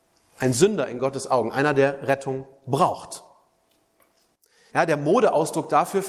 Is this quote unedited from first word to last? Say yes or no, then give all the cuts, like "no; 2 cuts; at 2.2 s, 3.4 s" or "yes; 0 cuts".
no; 1 cut; at 4.7 s